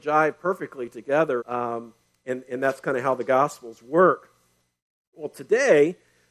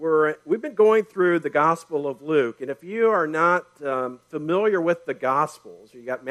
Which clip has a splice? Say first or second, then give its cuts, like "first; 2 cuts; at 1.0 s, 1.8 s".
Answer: first; 1 cut; at 1.4 s